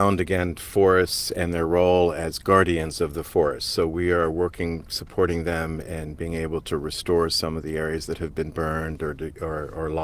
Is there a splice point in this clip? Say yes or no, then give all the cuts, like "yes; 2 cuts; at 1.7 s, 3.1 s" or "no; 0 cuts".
no; 0 cuts